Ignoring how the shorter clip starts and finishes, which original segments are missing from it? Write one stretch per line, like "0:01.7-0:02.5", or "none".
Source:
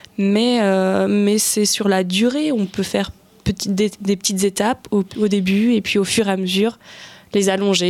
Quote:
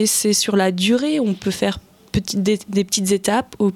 none